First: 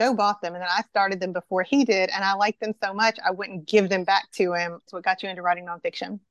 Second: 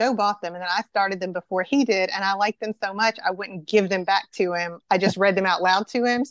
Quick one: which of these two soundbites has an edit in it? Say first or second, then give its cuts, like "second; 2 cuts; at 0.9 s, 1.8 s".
first; 1 cut; at 4.9 s